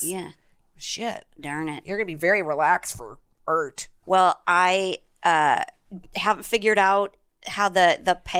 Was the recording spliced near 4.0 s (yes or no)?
no